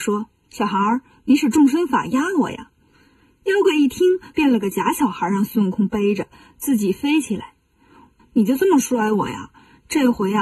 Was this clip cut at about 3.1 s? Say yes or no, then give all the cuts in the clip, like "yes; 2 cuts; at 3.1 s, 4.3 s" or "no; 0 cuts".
no; 2 cuts; at 4.3 s, 8.2 s